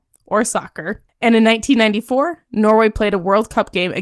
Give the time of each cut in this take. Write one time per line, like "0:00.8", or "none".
none

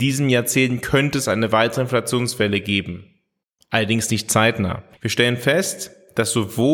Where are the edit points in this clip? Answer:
0:05.0

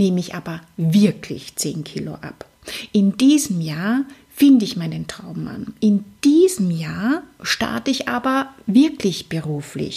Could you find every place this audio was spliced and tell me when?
none

